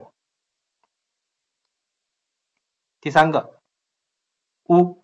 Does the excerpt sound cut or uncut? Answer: uncut